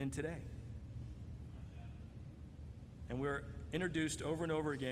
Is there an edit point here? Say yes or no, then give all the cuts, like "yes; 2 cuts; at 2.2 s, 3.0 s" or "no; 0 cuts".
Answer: yes; 1 cut; at 3.1 s